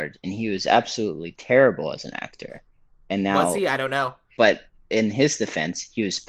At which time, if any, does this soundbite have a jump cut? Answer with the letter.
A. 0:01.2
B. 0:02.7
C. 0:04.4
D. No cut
C